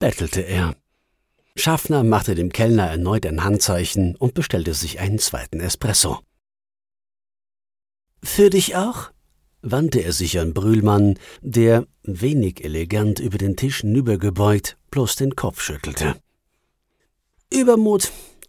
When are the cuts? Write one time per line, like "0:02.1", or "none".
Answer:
none